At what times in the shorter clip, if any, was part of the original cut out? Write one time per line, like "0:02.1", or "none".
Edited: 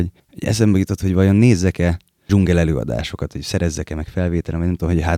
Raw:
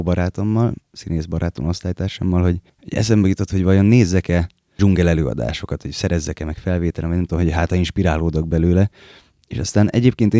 none